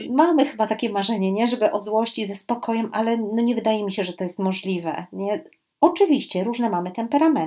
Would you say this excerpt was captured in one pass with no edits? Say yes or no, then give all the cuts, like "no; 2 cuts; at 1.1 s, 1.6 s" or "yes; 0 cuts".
yes; 0 cuts